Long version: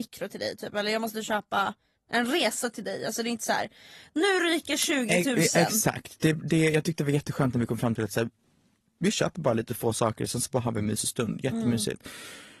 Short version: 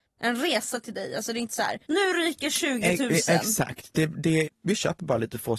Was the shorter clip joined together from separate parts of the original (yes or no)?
yes